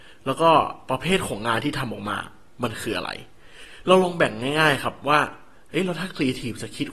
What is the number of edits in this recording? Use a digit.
0